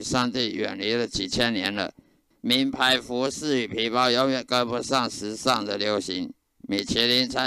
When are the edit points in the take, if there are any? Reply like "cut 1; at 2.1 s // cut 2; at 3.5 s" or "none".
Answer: cut 1; at 2.3 s